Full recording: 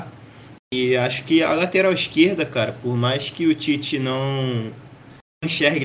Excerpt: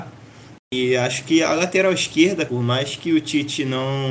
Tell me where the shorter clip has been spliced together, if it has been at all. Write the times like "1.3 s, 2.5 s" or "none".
2.5 s